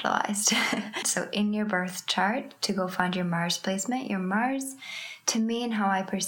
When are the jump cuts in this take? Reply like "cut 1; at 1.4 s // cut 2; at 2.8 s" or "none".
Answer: cut 1; at 1.0 s